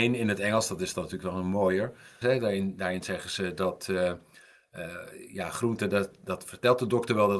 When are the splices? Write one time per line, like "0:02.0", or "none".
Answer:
0:02.2